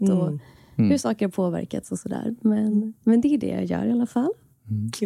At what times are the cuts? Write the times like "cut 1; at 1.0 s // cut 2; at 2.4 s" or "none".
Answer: none

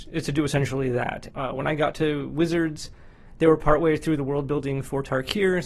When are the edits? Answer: cut 1; at 1.3 s

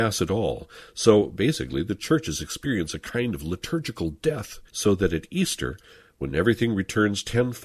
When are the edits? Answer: cut 1; at 4.7 s

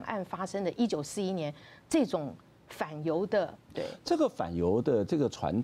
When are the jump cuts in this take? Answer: cut 1; at 3.7 s

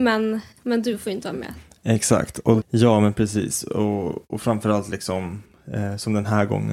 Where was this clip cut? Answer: cut 1; at 2.6 s

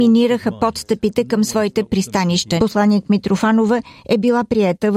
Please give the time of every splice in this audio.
cut 1; at 2.6 s

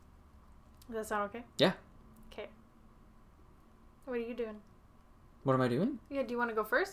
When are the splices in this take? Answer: none

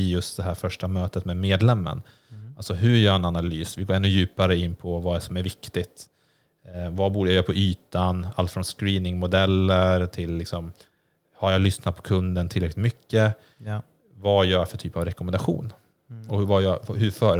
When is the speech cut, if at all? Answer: none

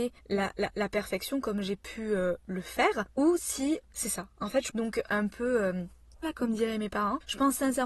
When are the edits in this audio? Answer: cut 1; at 4.7 s // cut 2; at 6.2 s

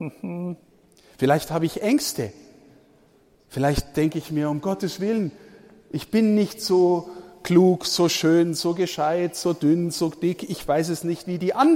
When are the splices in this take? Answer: none

